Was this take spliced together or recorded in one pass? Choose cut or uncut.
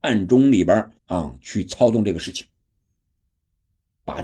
cut